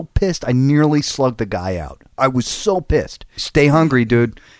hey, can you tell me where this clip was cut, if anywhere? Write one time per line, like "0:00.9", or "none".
0:03.4